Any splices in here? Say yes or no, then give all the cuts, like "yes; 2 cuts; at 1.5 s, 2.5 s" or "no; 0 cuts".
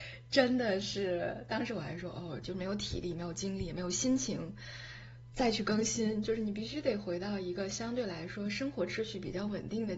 yes; 1 cut; at 2.4 s